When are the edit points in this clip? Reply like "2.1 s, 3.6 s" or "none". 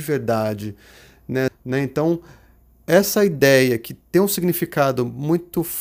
1.5 s